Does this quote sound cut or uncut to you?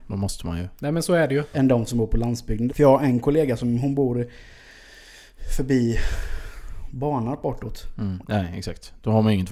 cut